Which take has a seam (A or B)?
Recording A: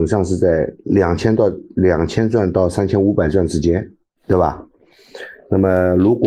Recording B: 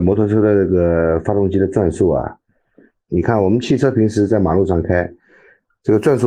B